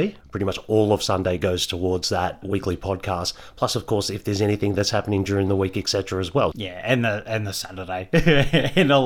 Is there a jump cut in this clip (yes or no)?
yes